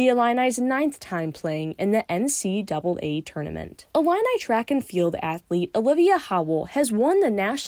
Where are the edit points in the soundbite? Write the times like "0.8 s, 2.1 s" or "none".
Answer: 3.9 s